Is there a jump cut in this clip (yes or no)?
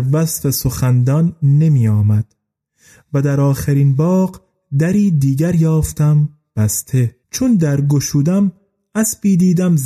yes